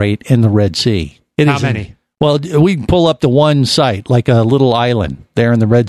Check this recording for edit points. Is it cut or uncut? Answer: uncut